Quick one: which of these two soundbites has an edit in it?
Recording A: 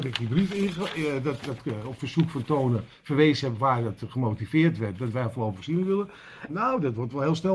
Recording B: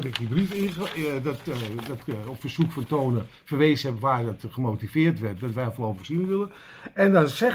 A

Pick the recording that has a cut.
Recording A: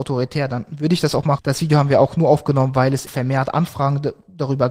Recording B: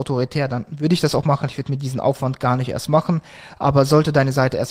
A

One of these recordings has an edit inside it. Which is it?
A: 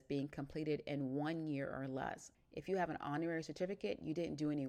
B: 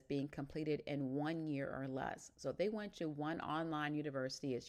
A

